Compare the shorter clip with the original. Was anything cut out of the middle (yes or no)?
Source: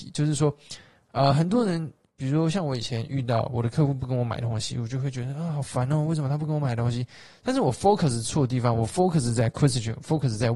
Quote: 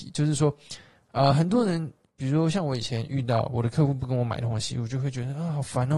no